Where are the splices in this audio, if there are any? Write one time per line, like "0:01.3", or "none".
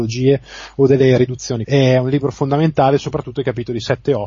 0:01.6